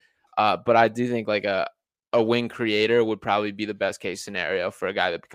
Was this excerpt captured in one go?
yes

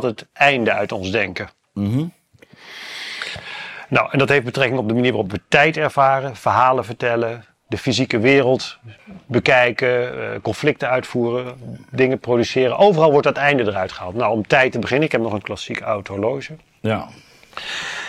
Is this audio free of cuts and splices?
yes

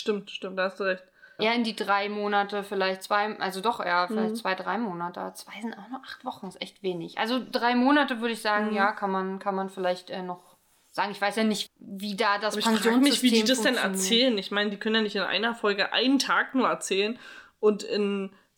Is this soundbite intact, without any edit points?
no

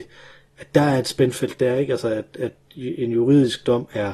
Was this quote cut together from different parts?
no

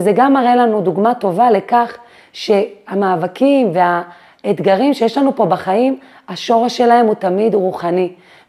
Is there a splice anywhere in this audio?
no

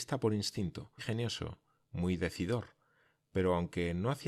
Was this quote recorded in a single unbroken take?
no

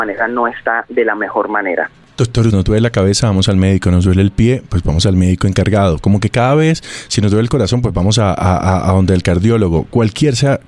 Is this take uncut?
no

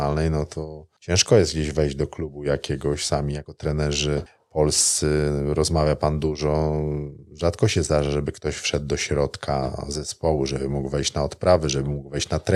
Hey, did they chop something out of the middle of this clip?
no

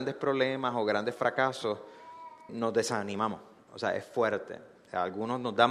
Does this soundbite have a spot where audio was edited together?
yes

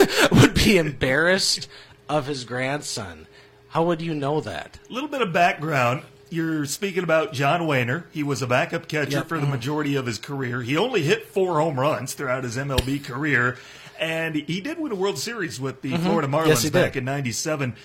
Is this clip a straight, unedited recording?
yes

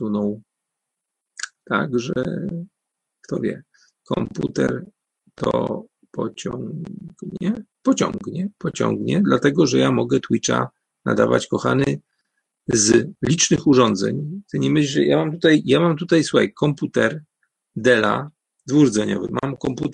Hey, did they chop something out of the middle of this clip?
no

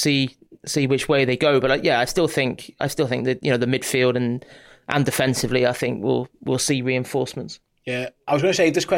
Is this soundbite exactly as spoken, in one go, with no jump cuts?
yes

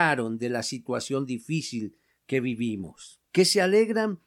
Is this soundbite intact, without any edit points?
no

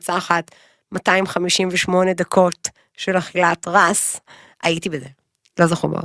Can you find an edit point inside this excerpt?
no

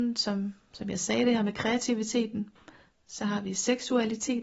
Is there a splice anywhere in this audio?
no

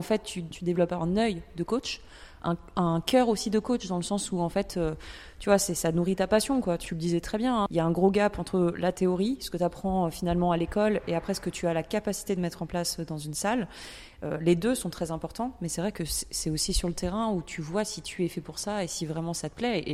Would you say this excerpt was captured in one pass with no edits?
yes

